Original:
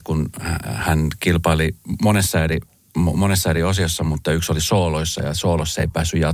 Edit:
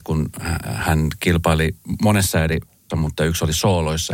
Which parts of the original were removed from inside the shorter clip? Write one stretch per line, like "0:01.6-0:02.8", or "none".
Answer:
0:02.9-0:04.0